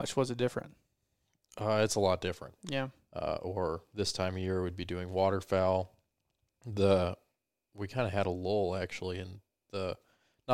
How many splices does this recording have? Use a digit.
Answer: 1